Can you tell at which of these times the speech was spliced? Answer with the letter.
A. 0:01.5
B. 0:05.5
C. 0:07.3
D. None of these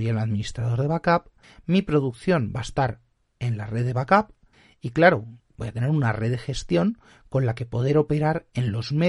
B